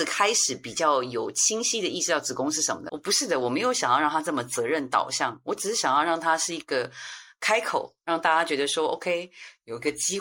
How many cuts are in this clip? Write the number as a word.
one